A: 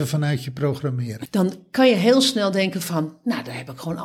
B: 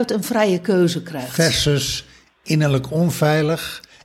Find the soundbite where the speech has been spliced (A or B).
A